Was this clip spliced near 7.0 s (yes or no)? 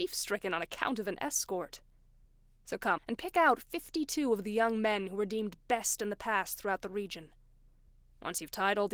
no